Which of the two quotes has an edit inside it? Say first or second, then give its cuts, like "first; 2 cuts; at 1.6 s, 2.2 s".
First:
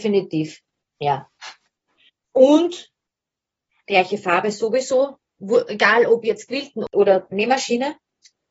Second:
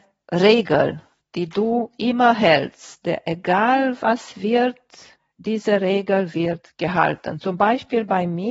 first; 1 cut; at 2.1 s